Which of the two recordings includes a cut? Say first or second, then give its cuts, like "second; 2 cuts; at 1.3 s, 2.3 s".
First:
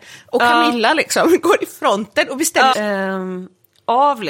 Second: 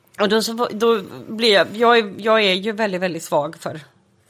first; 1 cut; at 2.7 s